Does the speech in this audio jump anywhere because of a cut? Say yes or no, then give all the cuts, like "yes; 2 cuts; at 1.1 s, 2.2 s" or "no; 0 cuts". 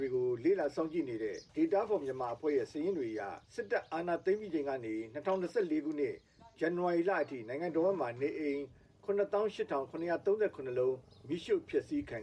yes; 2 cuts; at 1.5 s, 3.4 s